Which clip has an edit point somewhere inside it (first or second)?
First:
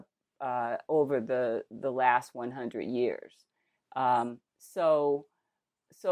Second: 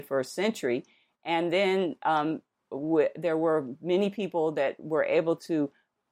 first